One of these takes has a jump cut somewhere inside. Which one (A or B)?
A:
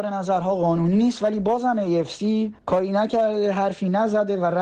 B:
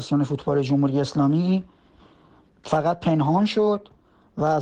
A